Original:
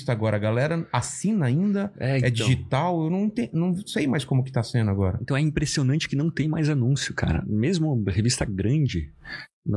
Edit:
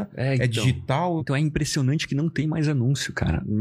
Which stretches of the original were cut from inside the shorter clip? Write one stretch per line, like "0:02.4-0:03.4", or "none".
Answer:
0:03.0-0:05.2